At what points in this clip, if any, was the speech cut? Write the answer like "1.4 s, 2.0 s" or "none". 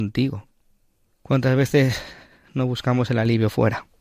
1.1 s